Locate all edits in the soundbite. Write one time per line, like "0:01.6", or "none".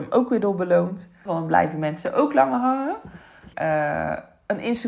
0:01.3
0:03.5